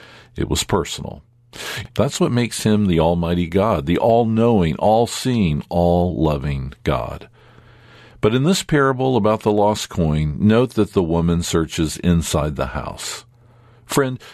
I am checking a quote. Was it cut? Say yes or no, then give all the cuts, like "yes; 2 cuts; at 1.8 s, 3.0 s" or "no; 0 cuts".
yes; 1 cut; at 1.9 s